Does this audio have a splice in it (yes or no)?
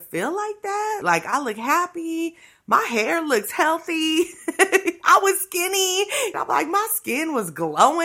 yes